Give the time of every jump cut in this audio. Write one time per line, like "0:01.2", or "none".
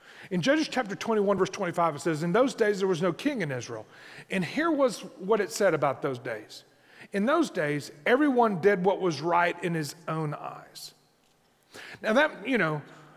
none

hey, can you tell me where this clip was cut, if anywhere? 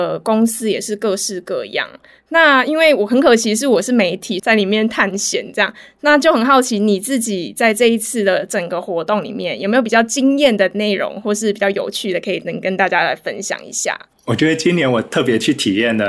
0:04.4

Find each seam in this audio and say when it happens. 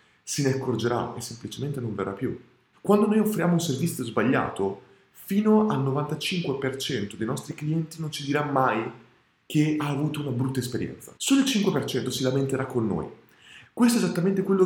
0:02.7
0:11.2
0:13.7

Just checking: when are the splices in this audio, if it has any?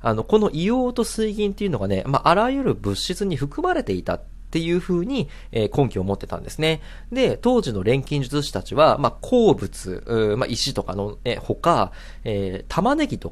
none

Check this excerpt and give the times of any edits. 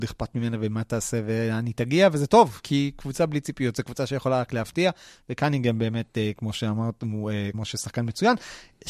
0:02.6
0:07.5

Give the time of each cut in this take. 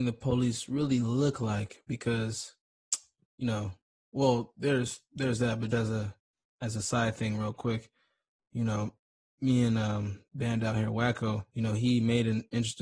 0:05.7
0:10.3
0:11.5

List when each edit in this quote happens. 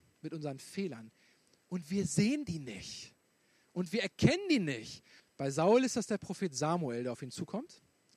0:05.2

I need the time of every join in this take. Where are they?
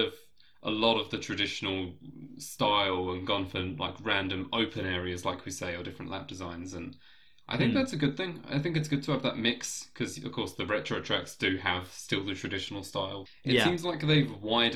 0:13.3

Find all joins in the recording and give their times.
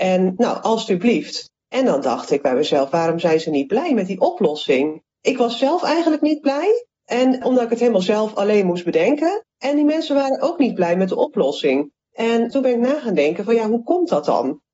none

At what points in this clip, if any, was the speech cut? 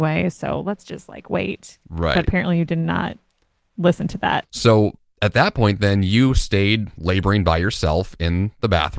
0:04.4

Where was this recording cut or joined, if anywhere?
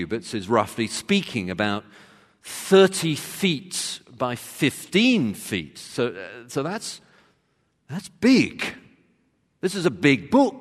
none

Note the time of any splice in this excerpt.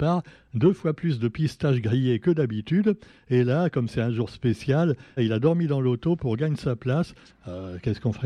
0:05.2
0:07.3

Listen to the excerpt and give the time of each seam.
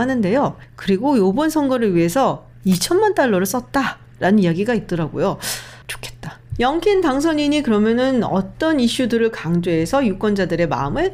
0:05.8

